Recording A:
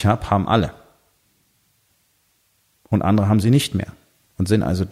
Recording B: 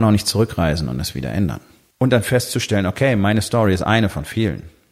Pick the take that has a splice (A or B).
B